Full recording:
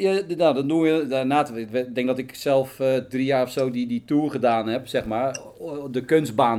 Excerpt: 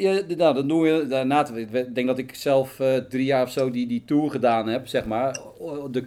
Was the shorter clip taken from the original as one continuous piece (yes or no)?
yes